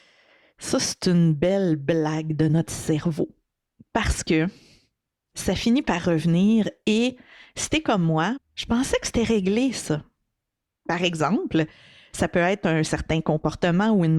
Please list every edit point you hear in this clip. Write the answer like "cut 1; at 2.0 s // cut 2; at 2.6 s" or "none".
cut 1; at 8.4 s